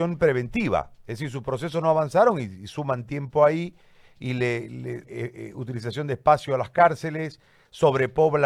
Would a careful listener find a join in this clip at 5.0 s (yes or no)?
yes